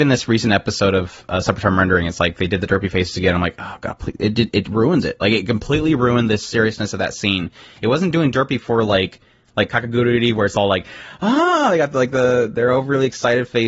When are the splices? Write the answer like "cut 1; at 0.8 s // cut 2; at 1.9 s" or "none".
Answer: none